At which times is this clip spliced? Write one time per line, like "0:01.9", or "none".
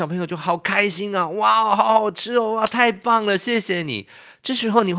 none